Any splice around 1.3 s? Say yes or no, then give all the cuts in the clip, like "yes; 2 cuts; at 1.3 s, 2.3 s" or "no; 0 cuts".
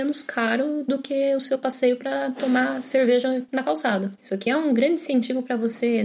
no; 1 cut; at 4.2 s